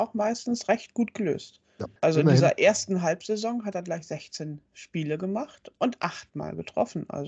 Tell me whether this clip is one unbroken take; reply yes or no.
no